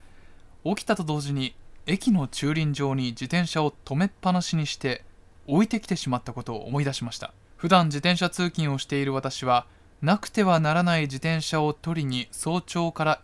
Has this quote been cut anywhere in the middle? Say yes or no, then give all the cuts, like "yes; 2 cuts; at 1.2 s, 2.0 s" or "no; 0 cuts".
yes; 1 cut; at 7.4 s